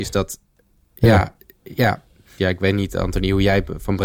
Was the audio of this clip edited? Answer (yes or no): yes